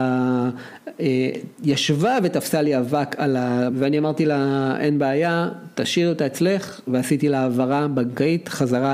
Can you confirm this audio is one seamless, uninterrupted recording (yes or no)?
no